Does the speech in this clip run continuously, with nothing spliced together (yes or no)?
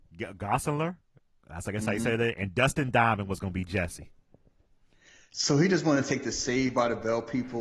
yes